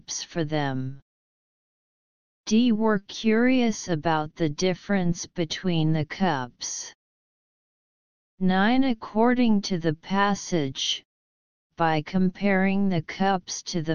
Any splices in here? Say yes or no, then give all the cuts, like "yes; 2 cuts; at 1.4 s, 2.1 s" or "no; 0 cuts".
no; 0 cuts